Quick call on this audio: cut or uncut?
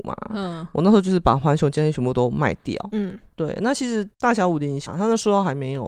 cut